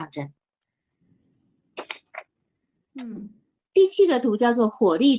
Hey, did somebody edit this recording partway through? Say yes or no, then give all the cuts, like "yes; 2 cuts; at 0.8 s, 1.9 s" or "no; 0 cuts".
yes; 1 cut; at 3.6 s